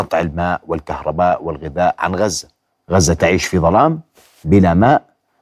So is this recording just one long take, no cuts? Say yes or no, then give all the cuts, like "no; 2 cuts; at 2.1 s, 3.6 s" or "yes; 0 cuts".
yes; 0 cuts